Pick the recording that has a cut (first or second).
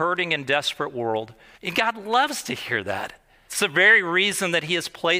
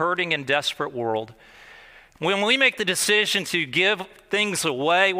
first